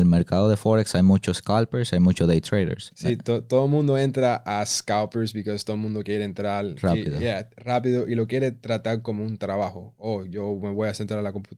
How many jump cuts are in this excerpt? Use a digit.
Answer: 1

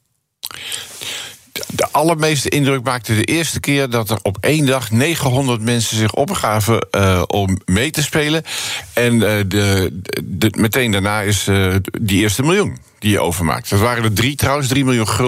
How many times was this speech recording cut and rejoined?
0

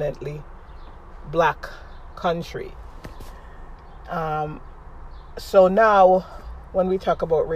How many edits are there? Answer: 0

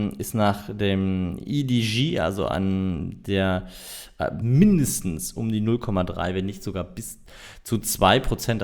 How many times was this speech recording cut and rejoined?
1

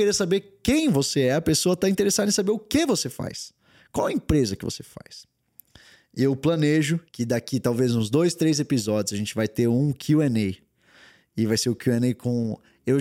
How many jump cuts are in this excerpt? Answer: 1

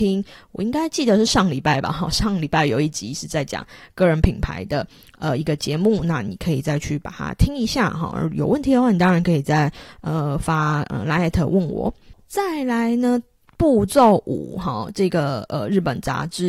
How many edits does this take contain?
0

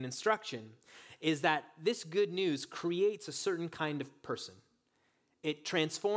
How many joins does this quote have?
0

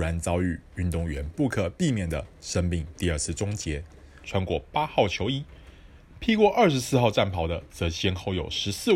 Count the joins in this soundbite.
1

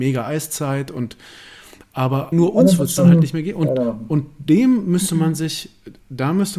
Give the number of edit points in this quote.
1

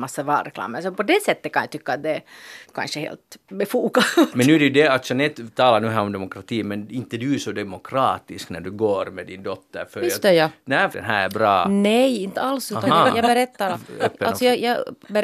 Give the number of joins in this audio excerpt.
3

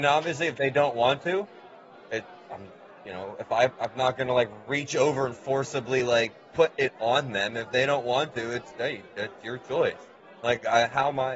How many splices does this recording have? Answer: 0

